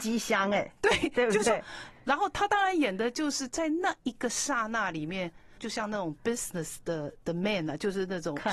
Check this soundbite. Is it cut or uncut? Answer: cut